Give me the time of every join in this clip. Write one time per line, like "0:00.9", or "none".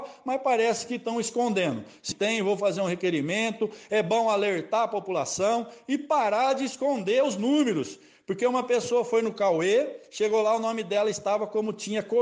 0:02.1